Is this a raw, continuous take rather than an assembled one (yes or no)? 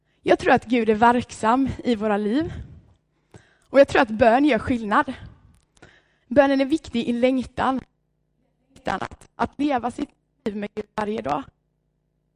no